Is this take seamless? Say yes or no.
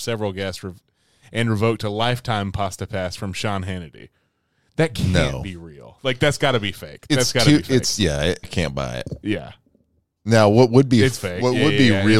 no